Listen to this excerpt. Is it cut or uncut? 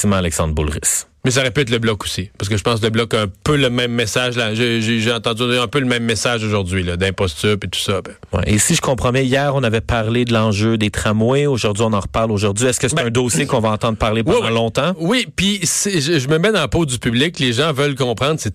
uncut